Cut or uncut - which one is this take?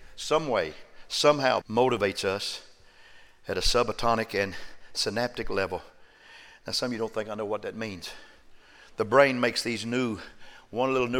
cut